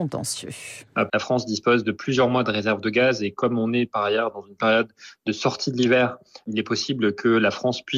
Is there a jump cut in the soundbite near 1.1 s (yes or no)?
yes